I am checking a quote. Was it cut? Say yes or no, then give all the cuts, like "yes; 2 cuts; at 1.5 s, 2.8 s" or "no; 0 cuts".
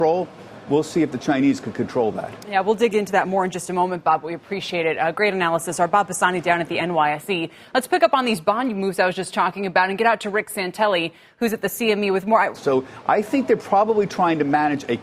yes; 1 cut; at 12.5 s